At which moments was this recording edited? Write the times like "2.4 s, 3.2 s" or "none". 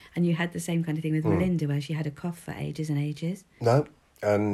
3.6 s